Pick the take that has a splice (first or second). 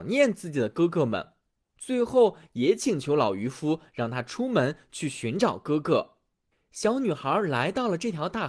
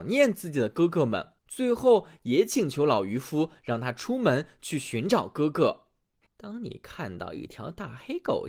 second